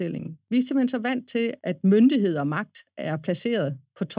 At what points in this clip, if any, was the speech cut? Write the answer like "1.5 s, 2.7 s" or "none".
1.6 s

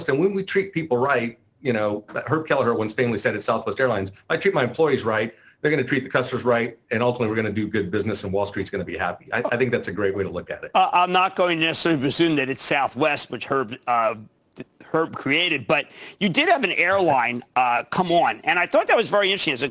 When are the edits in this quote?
none

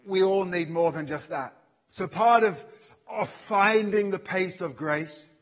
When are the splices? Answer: 1.9 s

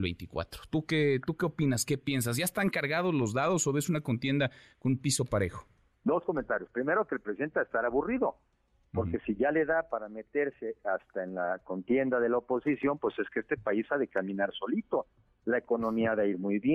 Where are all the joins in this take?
none

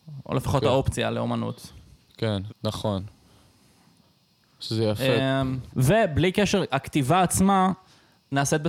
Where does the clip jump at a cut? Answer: 2.5 s, 5.7 s

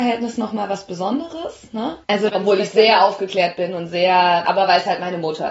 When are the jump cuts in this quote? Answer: 2.3 s, 4.4 s

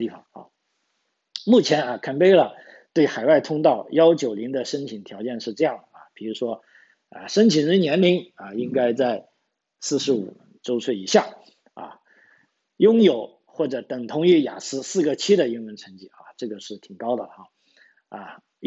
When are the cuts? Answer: none

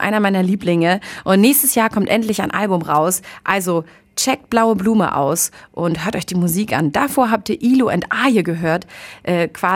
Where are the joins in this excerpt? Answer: none

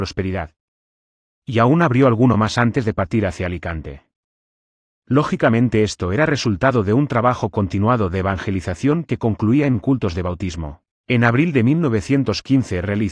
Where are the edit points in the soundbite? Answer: none

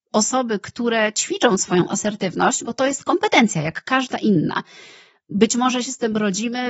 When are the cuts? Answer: none

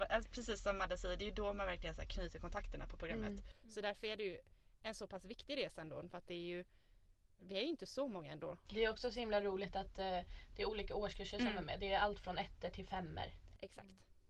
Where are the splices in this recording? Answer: 8.7 s

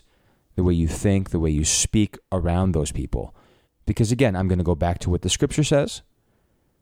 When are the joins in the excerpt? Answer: 3.6 s

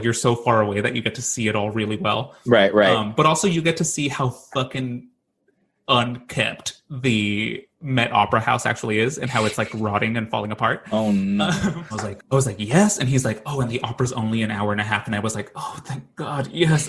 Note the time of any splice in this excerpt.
11.9 s

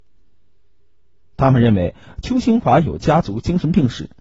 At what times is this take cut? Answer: 1.2 s

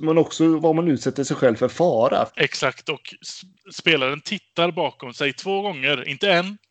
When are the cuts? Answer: 2.3 s

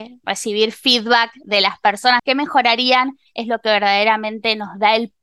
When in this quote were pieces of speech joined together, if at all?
2.2 s

